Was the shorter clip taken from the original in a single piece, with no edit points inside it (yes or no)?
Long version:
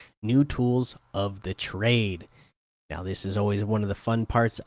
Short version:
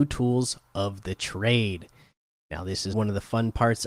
no